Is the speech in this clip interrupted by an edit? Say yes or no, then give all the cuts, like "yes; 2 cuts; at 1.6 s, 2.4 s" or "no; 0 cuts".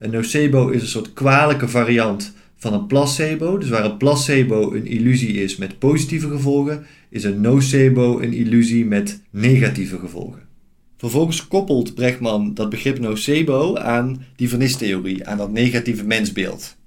no; 0 cuts